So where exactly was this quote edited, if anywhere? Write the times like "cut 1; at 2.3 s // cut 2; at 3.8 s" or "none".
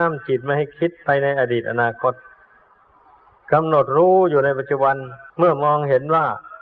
cut 1; at 5.3 s